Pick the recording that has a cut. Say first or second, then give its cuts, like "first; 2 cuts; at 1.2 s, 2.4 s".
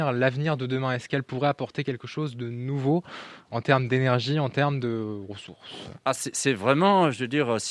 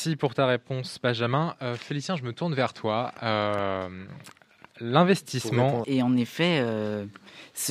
second; 1 cut; at 5.8 s